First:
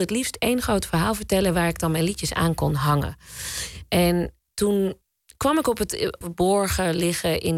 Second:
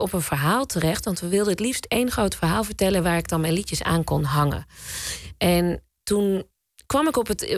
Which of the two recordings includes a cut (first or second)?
first